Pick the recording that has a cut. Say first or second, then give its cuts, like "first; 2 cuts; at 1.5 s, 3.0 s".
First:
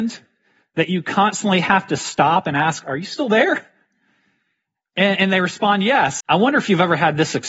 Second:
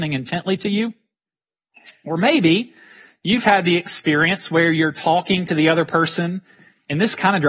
first; 1 cut; at 6.2 s